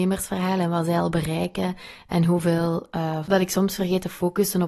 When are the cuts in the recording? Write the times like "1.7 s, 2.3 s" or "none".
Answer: 3.2 s

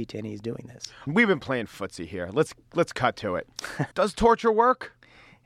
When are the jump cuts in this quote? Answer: 1.1 s, 3.9 s

